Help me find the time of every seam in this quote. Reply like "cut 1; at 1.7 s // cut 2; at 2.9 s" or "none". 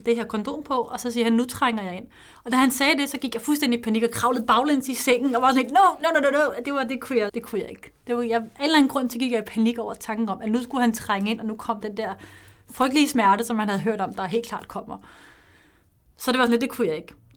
cut 1; at 7.3 s